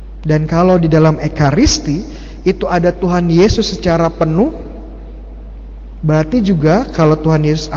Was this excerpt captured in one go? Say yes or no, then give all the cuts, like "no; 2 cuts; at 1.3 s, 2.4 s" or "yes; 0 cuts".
yes; 0 cuts